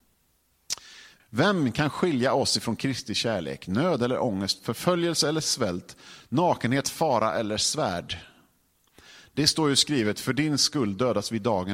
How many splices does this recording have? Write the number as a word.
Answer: one